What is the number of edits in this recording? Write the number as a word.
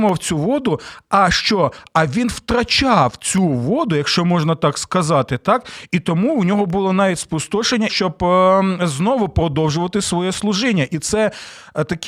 one